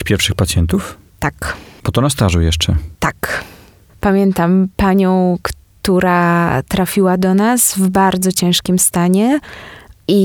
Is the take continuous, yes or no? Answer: yes